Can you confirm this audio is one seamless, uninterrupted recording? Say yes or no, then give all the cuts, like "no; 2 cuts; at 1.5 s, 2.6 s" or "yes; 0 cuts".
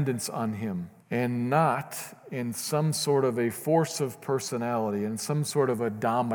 no; 1 cut; at 1.0 s